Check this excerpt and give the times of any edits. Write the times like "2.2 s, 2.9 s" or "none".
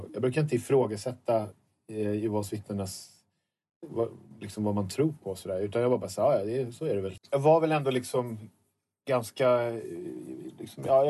7.2 s